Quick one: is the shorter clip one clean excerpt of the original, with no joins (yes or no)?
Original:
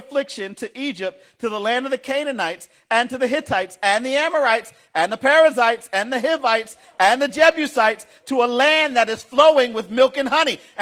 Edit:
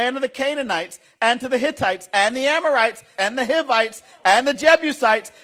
no